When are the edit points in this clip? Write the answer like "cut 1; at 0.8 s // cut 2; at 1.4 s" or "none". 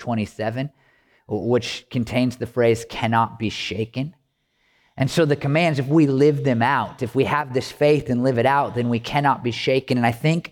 none